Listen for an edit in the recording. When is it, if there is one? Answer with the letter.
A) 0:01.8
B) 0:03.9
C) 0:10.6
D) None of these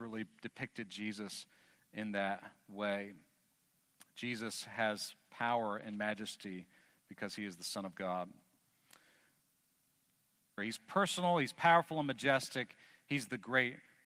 C